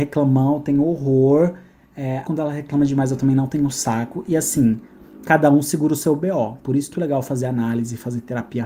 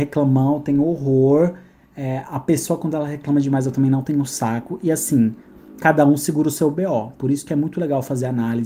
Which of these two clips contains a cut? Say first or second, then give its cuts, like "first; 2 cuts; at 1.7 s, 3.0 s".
first; 2 cuts; at 2.3 s, 6.9 s